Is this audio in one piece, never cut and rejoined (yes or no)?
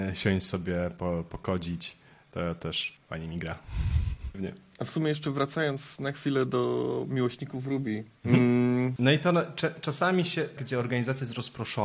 no